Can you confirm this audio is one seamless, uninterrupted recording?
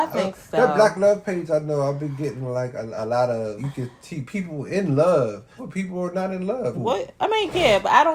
no; 3 cuts; at 3.6 s, 5.6 s, 6.7 s

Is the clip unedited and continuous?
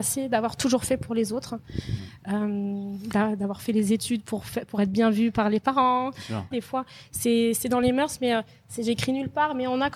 no; 1 cut; at 6.5 s

